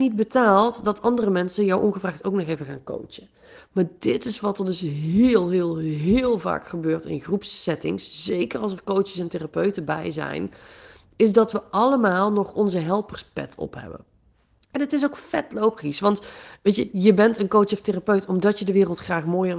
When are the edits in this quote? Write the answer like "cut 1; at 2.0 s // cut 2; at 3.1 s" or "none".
none